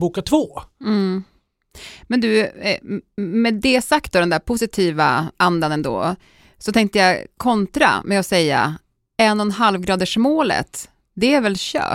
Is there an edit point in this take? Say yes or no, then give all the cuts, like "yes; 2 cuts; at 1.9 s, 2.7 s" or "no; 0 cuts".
no; 0 cuts